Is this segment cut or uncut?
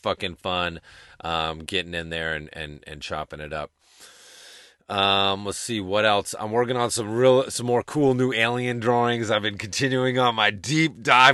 uncut